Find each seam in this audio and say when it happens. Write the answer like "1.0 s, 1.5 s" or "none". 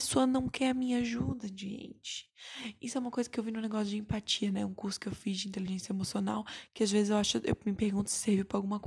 none